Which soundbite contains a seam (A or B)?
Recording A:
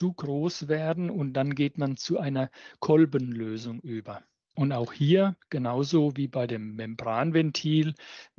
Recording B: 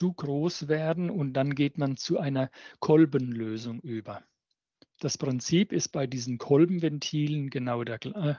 A